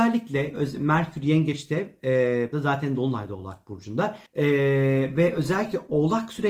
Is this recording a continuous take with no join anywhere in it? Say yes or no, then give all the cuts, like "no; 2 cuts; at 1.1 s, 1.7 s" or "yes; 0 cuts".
no; 2 cuts; at 2.5 s, 4.3 s